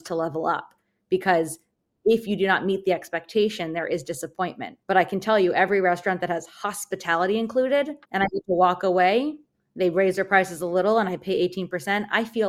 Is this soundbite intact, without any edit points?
no; 2 cuts; at 4.8 s, 8.0 s

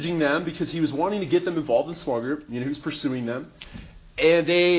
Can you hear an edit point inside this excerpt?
no; 0 cuts

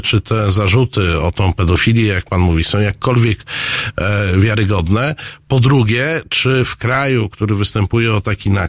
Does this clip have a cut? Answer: no; 0 cuts

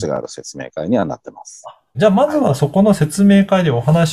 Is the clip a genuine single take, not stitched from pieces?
no; 1 cut; at 1.9 s

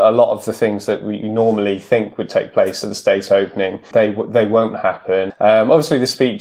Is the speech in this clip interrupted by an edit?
yes; 2 cuts; at 3.9 s, 5.3 s

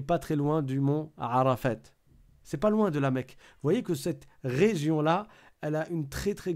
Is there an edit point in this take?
yes; 1 cut; at 2.4 s

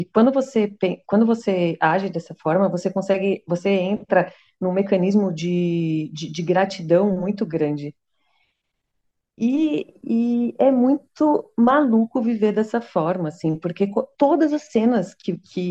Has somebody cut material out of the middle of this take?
no; 0 cuts

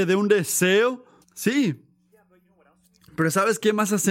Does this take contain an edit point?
yes; 1 cut; at 1.2 s

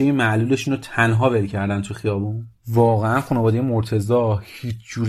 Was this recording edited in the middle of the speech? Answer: yes; 1 cut; at 2.6 s

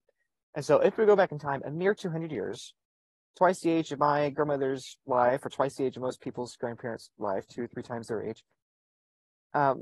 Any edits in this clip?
no; 0 cuts

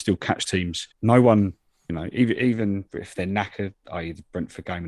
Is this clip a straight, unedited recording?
no; 1 cut; at 0.9 s

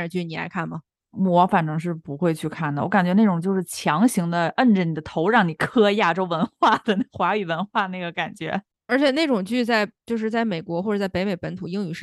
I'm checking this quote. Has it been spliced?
no; 0 cuts

